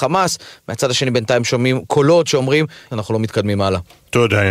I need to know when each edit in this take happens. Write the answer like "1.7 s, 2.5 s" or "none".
2.9 s